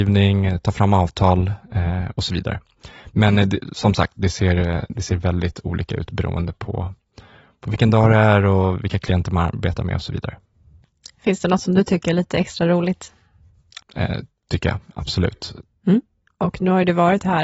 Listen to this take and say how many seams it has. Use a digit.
1